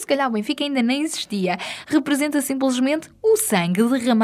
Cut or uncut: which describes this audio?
uncut